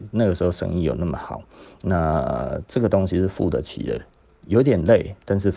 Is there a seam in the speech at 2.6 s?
no; 0 cuts

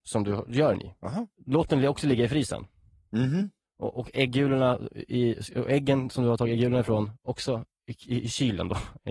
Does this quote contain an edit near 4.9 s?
no; 0 cuts

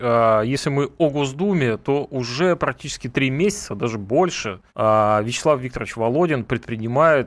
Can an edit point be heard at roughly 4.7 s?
yes; 1 cut; at 4.7 s

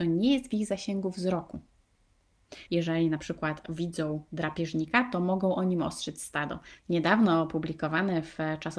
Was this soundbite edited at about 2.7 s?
yes; 2 cuts; at 2.7 s, 6.8 s

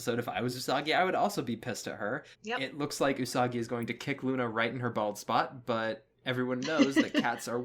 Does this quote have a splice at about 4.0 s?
no; 1 cut; at 2.3 s

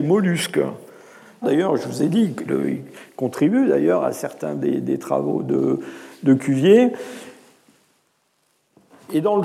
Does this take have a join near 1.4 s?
yes; 2 cuts; at 1.4 s, 2.4 s

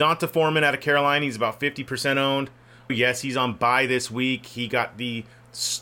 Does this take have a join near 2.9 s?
yes; 1 cut; at 2.9 s

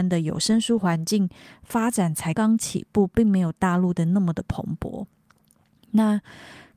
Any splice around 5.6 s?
no; 1 cut; at 2.3 s

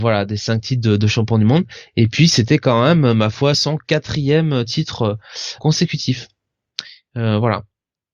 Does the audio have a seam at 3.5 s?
yes; 2 cuts; at 3.5 s, 5.6 s

